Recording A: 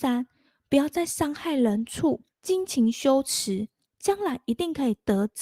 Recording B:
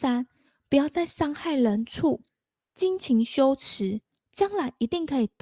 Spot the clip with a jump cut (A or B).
A